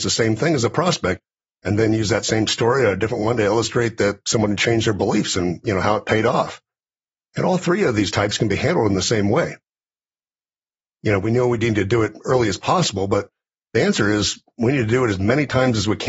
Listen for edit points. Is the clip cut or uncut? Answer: cut